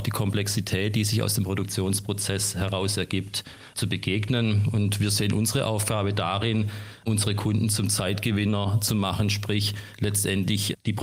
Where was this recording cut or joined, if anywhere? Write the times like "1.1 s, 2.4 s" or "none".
none